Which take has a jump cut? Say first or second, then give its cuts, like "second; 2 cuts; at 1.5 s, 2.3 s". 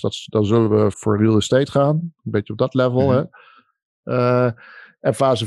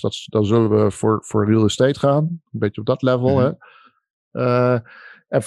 first; 1 cut; at 0.9 s